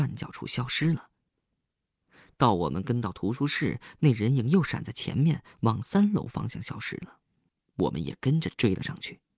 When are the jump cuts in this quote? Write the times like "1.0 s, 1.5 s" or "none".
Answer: none